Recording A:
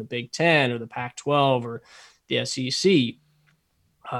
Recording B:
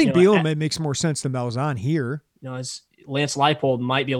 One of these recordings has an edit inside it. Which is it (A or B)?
B